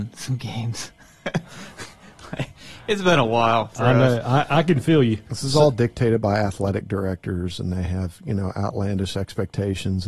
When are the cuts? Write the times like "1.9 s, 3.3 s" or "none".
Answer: 5.3 s

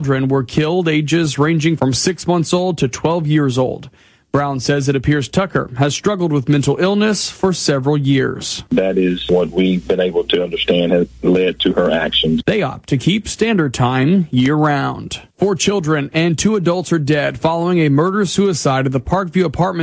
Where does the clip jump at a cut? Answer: 12.4 s

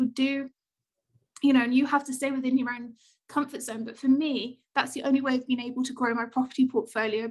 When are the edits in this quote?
none

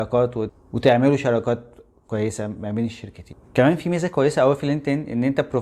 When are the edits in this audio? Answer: 3.4 s

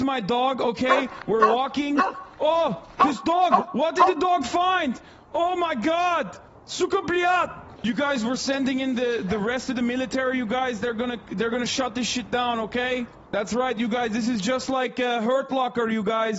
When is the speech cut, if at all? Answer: none

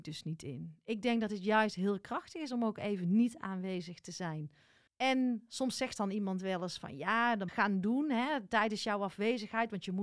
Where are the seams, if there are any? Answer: 4.9 s, 7.5 s

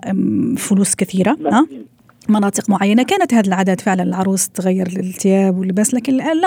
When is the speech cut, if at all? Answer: 2.2 s

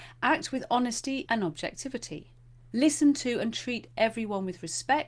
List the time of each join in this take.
1.3 s, 2.7 s

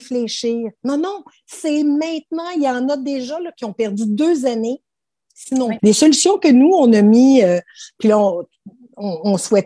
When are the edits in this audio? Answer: 5.8 s

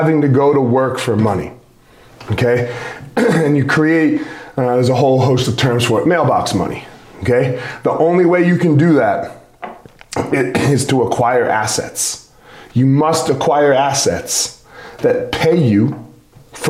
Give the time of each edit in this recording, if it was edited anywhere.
none

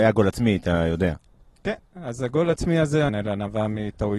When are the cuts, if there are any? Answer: 3.1 s

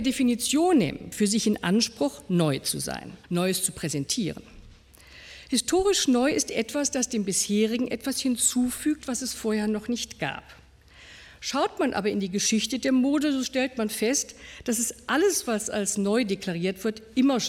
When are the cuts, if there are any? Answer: 3.2 s

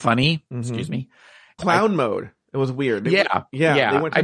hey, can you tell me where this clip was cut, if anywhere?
1.6 s

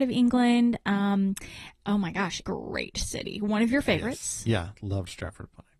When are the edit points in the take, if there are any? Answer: 2.4 s

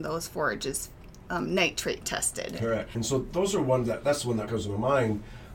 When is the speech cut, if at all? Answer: 2.9 s, 4.5 s

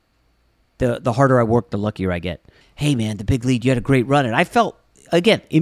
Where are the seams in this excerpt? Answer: 2.6 s

